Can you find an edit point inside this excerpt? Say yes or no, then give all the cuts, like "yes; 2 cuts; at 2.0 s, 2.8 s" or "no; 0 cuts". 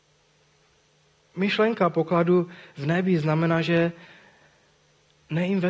no; 0 cuts